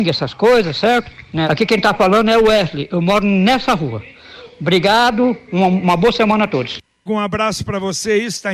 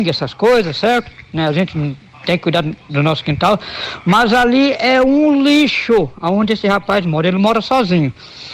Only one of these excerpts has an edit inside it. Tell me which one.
first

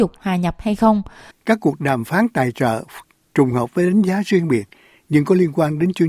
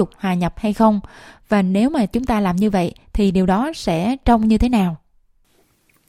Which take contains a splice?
first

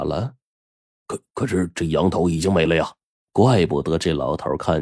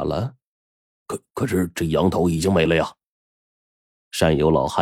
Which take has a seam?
first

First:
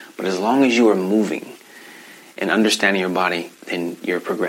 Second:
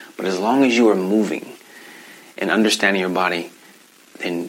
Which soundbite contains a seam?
first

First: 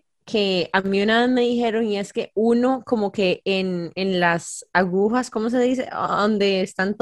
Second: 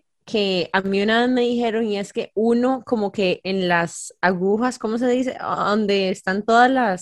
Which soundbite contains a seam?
second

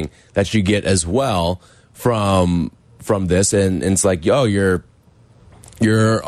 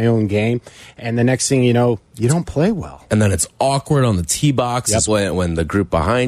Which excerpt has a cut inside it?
second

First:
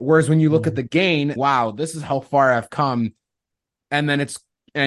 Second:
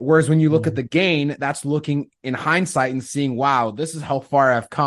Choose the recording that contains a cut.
first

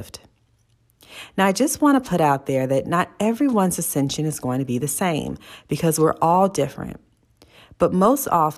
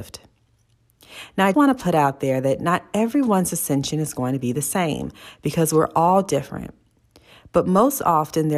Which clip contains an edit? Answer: second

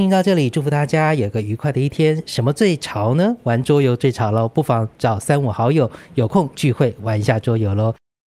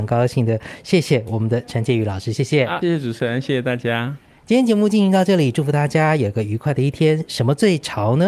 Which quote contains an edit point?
second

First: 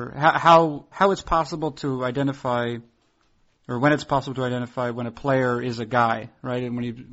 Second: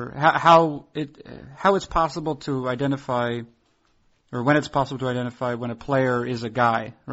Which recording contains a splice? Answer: first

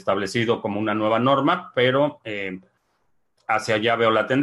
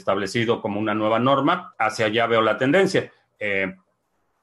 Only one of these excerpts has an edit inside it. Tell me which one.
second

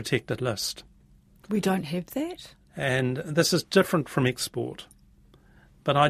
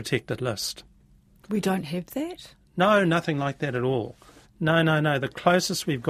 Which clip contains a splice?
first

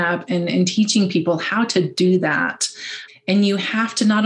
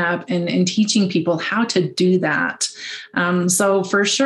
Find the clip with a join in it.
first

